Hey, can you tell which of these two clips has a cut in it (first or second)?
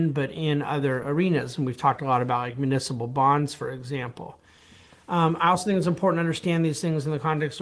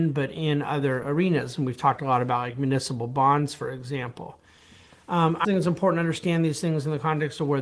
second